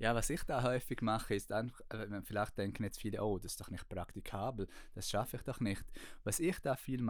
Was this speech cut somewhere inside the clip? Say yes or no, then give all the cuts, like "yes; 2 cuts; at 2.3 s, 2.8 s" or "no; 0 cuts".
no; 0 cuts